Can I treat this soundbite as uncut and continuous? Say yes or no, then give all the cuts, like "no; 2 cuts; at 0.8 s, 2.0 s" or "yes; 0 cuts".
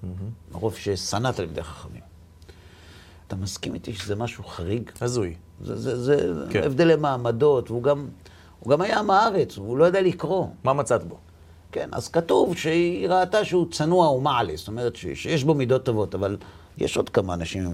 no; 1 cut; at 3.3 s